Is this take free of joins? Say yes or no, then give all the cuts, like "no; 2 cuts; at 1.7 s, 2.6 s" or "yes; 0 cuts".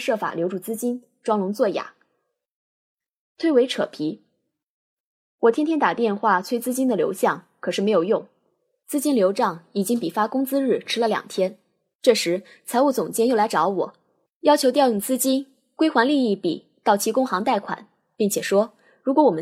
yes; 0 cuts